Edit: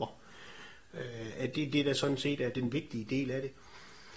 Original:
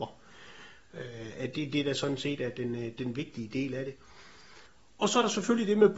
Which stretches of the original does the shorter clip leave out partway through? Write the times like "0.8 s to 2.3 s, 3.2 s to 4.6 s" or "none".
2.5 s to 3.0 s